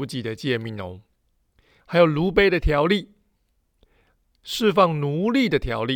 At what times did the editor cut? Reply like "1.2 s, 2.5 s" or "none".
none